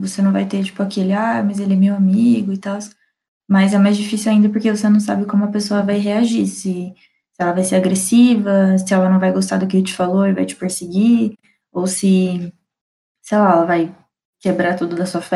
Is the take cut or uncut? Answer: uncut